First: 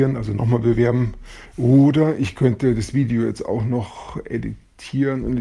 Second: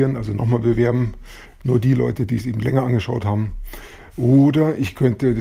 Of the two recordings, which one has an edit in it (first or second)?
first